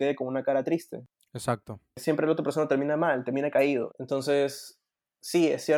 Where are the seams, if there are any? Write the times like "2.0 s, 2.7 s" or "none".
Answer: 3.9 s